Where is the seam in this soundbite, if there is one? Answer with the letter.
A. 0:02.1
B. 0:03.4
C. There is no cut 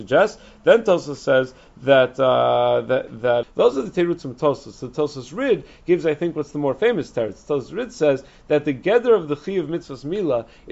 B